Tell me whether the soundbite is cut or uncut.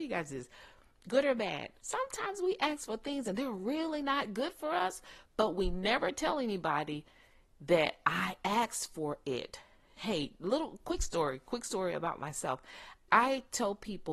cut